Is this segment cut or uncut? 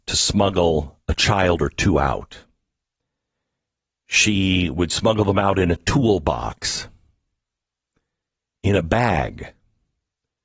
uncut